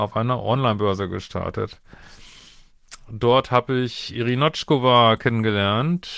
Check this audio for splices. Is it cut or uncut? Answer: uncut